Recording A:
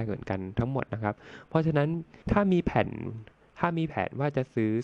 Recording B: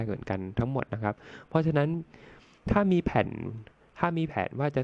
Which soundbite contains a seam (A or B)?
A